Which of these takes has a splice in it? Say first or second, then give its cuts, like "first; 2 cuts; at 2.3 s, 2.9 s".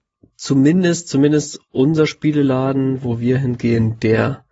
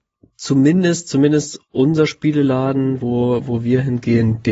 first; 1 cut; at 3.0 s